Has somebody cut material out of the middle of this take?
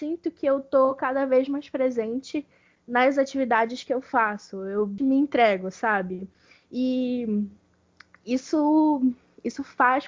yes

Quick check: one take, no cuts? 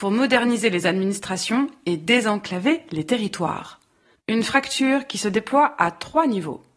no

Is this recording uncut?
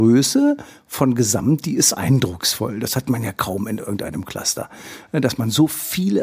yes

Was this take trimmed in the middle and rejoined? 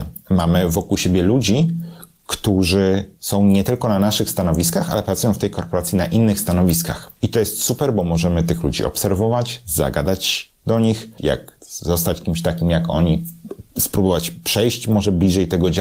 yes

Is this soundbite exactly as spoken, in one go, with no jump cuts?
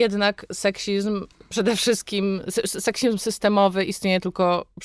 yes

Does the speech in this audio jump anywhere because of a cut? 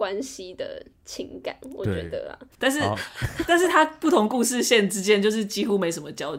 yes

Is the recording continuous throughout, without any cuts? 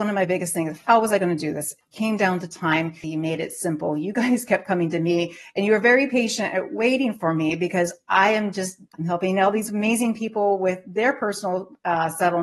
no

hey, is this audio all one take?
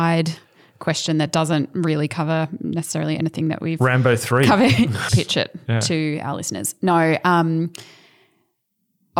no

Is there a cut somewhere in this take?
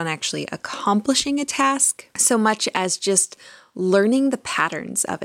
no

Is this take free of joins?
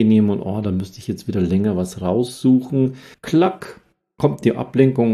no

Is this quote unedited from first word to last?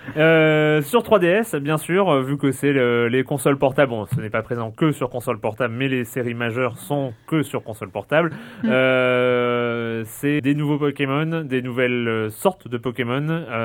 no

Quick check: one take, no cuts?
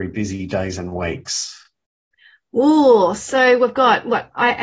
yes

